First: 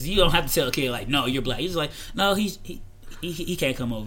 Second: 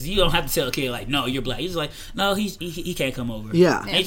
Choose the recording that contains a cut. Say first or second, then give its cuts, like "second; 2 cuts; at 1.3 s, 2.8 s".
second; 1 cut; at 2.6 s